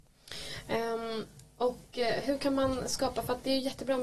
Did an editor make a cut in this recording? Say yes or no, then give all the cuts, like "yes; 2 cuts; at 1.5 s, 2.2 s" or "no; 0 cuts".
no; 0 cuts